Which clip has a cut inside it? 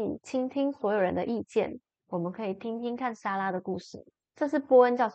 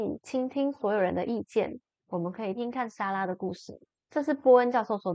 second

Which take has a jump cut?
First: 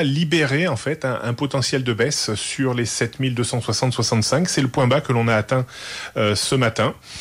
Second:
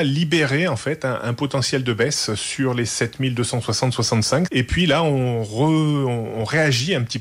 second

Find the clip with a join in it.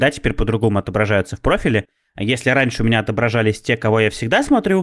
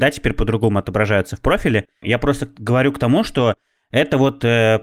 second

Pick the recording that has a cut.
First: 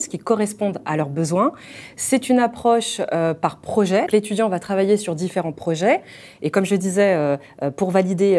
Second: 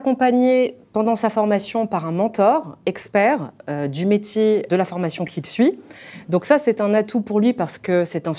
first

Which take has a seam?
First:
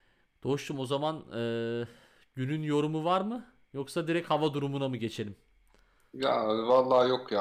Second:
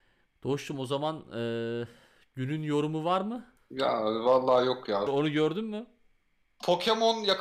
second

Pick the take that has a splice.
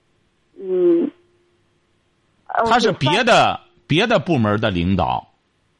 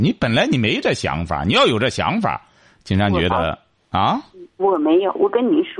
second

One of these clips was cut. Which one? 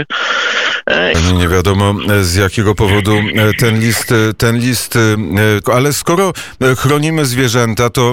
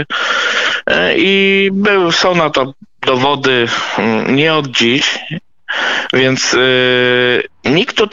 first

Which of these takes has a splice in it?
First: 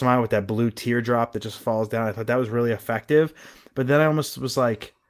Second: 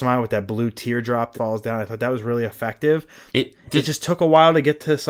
second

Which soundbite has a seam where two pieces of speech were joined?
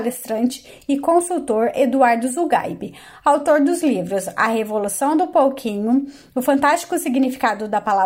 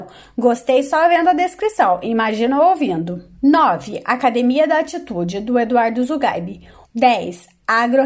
second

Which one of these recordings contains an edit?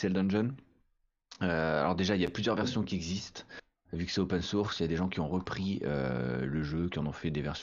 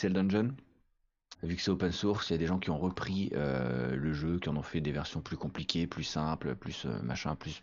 second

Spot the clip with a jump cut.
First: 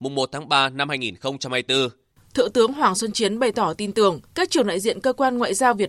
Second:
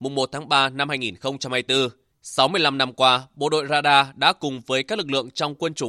first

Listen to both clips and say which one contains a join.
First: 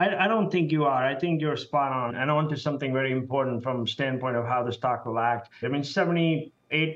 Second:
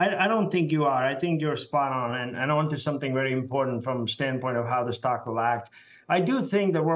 first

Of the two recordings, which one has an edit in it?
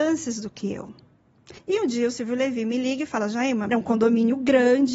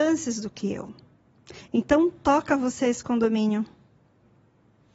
first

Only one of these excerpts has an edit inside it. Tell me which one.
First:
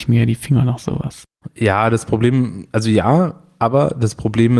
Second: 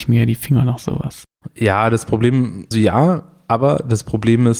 second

